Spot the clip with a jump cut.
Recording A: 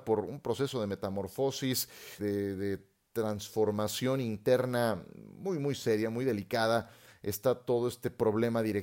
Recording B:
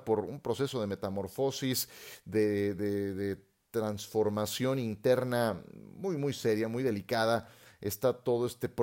A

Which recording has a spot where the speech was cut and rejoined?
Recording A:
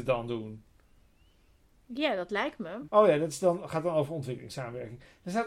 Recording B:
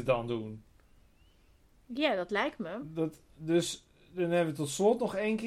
A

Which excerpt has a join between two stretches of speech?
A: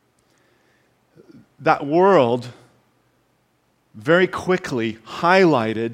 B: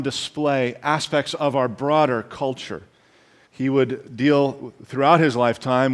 B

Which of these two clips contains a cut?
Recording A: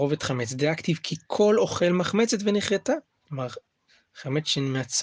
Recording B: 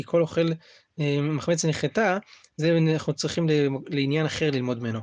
A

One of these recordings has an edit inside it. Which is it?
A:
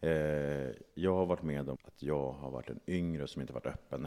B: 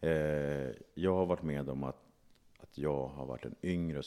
A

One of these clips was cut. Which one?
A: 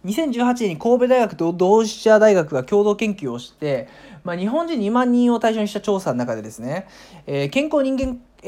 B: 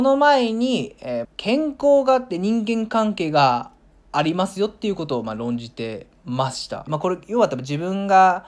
B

